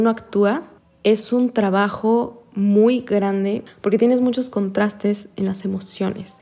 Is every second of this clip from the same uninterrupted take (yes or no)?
yes